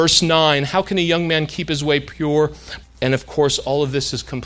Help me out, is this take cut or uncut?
cut